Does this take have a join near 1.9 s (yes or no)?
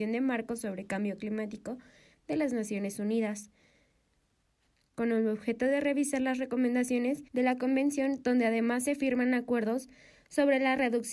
no